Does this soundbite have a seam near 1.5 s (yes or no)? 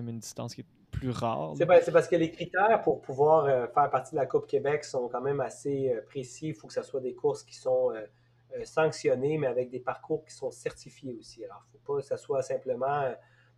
no